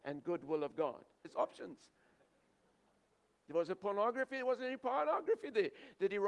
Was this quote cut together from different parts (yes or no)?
yes